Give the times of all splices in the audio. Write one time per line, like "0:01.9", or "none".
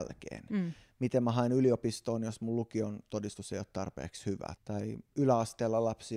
0:04.6